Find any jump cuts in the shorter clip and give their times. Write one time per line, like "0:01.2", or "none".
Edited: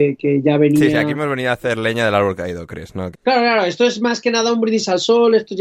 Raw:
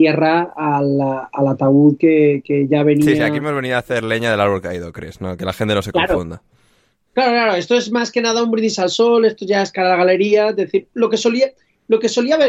0:03.1